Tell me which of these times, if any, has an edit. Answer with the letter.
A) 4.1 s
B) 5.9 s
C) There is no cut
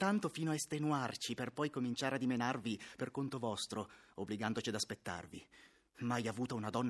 C